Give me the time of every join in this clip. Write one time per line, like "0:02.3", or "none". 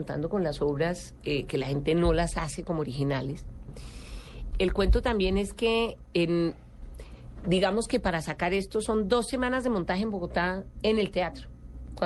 0:04.5